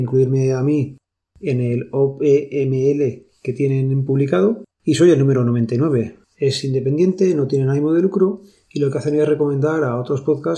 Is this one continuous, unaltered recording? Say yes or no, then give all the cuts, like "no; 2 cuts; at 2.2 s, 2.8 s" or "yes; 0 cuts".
no; 1 cut; at 6.2 s